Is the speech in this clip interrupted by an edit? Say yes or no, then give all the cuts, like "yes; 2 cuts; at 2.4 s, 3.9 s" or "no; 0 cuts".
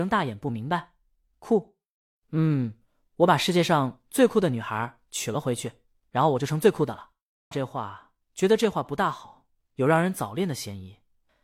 yes; 1 cut; at 7.5 s